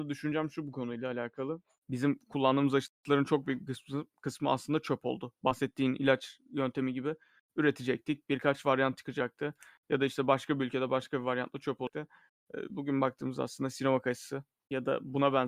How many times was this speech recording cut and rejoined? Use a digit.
0